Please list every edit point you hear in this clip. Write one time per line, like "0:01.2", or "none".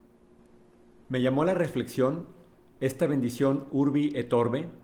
0:01.0